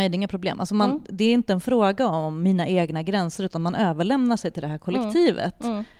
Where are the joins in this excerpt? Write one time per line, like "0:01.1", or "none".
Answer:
none